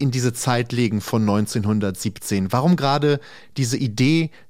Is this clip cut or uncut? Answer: uncut